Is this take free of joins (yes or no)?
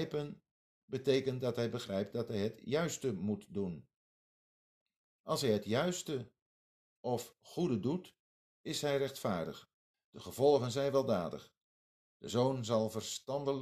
no